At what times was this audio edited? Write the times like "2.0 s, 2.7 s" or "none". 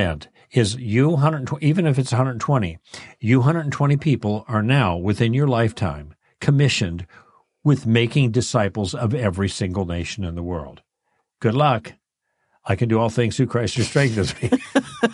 none